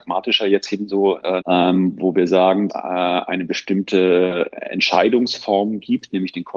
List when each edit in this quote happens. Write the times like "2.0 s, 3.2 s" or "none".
1.4 s, 2.7 s